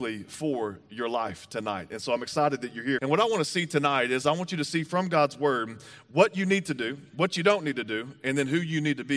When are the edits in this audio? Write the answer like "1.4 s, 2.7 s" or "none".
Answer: 3.0 s